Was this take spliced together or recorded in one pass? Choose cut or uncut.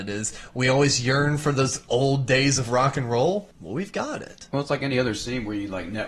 cut